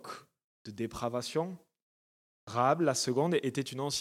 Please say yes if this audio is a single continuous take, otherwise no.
no